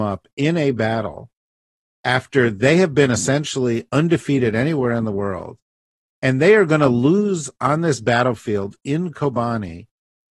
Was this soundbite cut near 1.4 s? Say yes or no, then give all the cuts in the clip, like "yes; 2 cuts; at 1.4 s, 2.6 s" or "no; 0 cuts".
no; 0 cuts